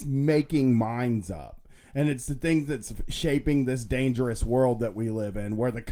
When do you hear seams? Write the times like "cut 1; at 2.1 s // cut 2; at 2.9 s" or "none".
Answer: none